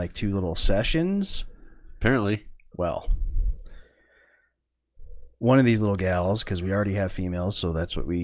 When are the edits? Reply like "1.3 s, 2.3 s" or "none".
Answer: 2.7 s